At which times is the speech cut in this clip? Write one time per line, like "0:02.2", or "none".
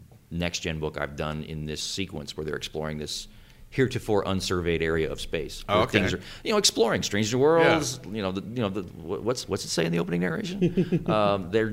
none